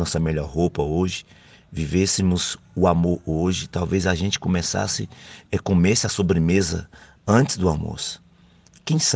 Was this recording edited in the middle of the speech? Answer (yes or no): no